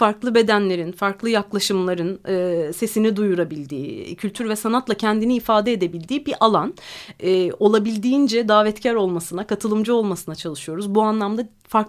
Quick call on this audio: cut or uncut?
uncut